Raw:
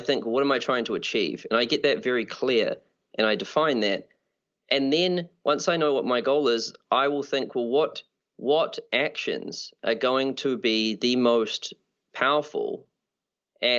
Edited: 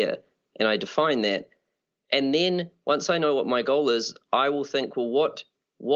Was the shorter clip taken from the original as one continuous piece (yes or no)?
yes